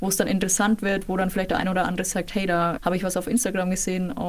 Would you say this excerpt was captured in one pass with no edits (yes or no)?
no